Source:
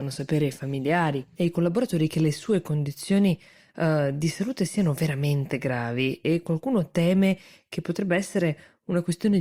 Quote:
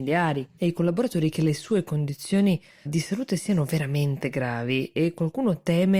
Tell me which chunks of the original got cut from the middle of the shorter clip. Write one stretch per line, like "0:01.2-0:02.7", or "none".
0:03.6-0:04.1